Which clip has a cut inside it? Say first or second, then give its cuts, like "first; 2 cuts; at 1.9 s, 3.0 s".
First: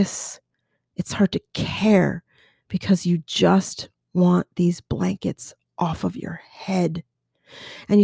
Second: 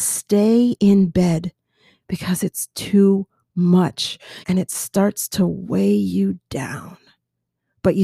second; 1 cut; at 4.4 s